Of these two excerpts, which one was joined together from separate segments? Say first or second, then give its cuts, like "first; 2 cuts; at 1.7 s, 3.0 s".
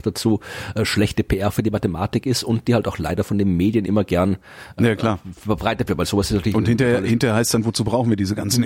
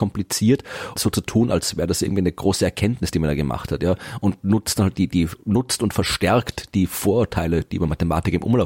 second; 1 cut; at 1.0 s